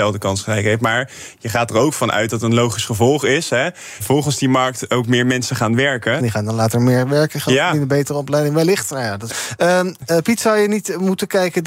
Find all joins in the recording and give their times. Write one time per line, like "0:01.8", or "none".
0:04.0
0:06.2
0:09.3